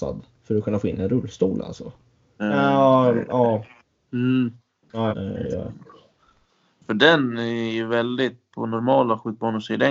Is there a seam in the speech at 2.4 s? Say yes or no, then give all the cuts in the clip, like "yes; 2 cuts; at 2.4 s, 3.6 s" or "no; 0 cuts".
yes; 3 cuts; at 2.4 s, 5.1 s, 8.5 s